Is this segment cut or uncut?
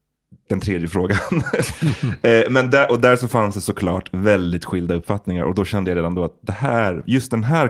uncut